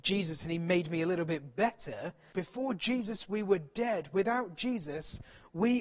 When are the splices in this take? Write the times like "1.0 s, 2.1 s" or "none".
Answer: 2.3 s